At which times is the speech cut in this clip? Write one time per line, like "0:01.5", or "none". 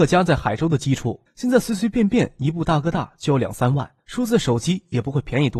0:01.3
0:04.0